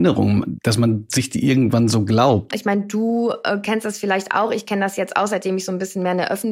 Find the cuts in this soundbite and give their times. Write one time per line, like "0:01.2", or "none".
0:02.5